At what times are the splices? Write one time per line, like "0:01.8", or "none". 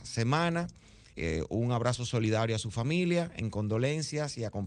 0:01.1